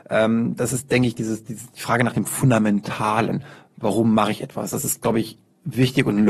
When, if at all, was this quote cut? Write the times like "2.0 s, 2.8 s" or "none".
none